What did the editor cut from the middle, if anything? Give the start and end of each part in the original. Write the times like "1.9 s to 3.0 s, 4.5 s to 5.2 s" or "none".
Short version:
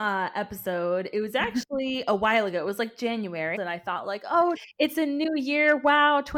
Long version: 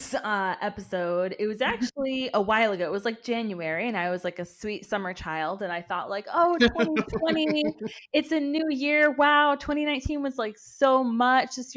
3.8 s to 5.6 s, 6.6 s to 7.9 s